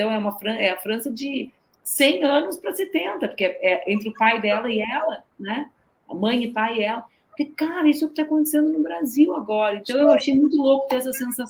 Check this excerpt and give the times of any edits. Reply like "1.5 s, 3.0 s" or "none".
none